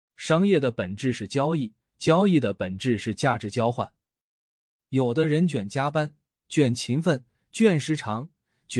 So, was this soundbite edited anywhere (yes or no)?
no